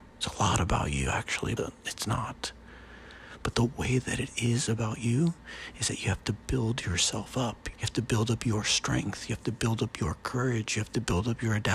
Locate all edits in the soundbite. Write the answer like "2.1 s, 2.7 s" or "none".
1.6 s, 7.7 s